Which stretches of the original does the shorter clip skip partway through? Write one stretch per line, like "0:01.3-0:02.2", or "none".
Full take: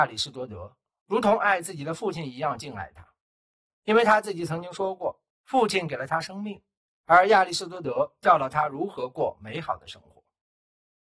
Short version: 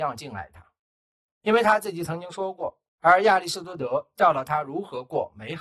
0:05.3-0:07.0